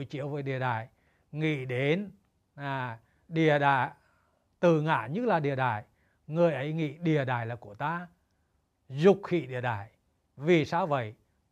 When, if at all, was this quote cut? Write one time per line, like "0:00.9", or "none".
none